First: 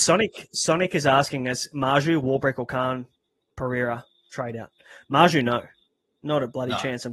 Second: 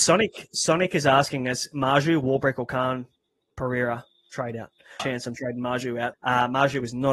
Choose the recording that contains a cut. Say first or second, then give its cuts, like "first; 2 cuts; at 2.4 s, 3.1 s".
second; 2 cuts; at 5.0 s, 6.1 s